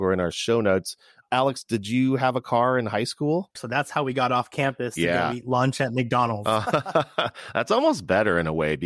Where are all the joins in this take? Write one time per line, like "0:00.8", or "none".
0:03.6